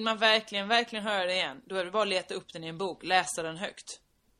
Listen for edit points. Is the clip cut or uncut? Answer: uncut